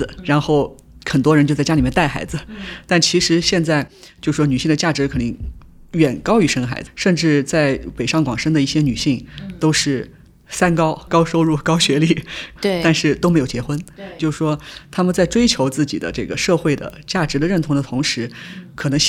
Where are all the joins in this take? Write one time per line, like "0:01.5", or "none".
0:12.6
0:14.2